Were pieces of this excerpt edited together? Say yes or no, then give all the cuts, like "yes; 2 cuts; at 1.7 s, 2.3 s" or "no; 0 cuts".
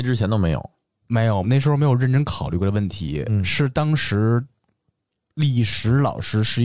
yes; 1 cut; at 1.4 s